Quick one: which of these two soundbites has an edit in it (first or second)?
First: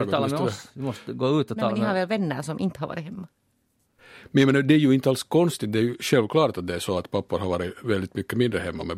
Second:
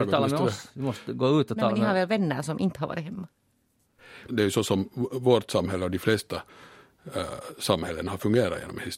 second